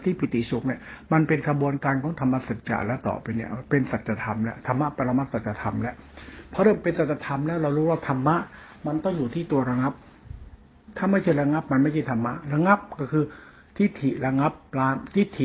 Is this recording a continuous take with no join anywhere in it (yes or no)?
yes